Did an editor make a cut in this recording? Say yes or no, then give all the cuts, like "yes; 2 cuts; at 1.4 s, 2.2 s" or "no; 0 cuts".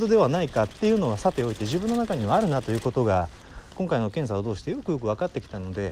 no; 0 cuts